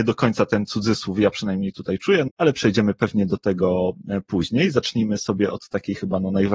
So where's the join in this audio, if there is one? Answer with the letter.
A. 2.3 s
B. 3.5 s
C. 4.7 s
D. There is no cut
A